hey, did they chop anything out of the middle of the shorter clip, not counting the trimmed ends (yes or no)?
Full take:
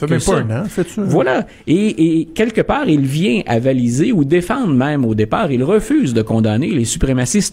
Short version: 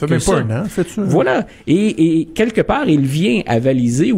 no